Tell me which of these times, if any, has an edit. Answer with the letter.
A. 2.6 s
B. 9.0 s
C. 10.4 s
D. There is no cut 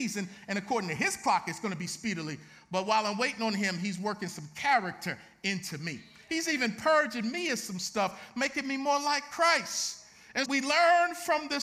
C